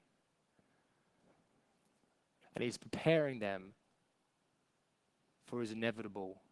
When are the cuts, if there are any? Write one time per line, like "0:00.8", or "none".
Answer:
0:02.4